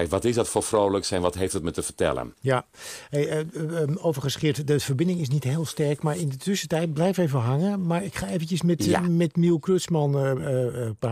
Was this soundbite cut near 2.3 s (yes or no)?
no